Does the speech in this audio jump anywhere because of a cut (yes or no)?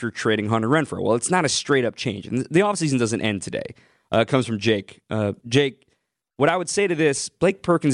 yes